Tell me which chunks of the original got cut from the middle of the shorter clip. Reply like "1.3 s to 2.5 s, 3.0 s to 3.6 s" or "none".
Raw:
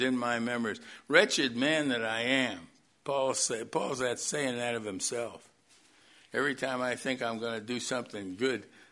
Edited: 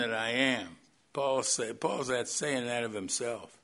none